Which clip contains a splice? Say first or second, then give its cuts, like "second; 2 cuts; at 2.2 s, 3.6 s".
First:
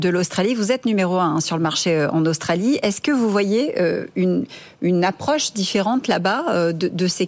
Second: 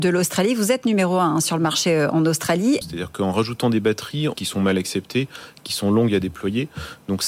second; 2 cuts; at 2.8 s, 4.4 s